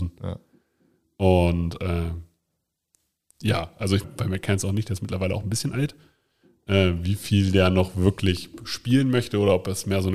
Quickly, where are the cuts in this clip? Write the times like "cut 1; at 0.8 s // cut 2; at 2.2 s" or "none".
cut 1; at 4.0 s